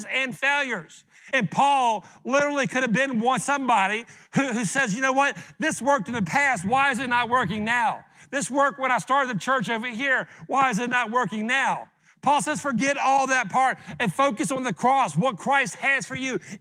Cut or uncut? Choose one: uncut